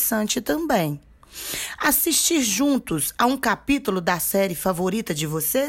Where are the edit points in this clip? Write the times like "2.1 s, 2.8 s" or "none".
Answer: none